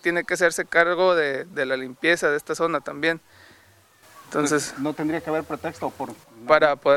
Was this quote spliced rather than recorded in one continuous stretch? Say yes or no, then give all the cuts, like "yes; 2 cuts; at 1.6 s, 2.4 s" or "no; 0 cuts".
no; 0 cuts